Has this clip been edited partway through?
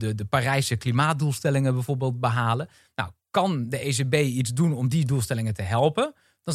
no; 0 cuts

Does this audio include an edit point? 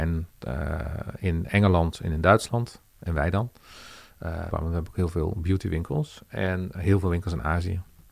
yes; 2 cuts; at 4.5 s, 6.7 s

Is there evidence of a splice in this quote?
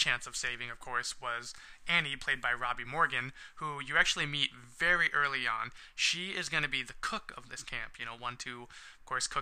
no; 0 cuts

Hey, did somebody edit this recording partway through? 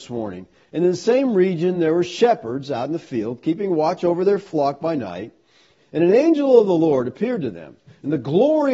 no; 0 cuts

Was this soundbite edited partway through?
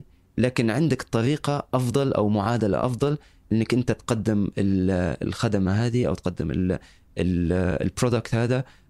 no; 0 cuts

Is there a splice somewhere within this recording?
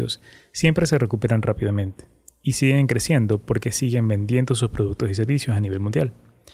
no; 0 cuts

